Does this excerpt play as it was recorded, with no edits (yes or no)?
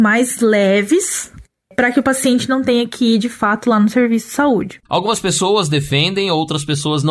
no